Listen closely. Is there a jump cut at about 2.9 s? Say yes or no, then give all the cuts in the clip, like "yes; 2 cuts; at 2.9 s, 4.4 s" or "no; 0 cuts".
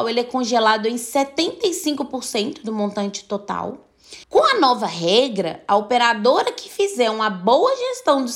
no; 1 cut; at 4.2 s